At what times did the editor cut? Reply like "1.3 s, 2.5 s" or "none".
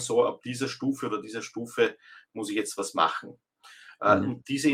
none